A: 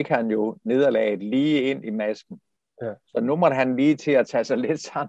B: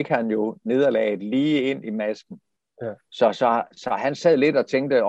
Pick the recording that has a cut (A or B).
B